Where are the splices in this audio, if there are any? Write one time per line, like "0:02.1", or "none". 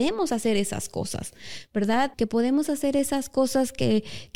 0:02.1